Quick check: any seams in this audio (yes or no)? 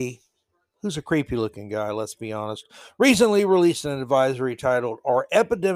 no